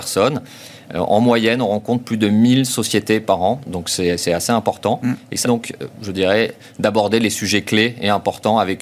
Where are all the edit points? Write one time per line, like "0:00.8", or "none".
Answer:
0:05.4